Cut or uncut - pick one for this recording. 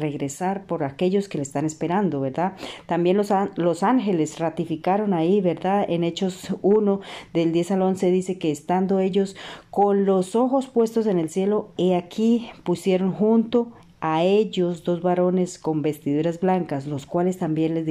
cut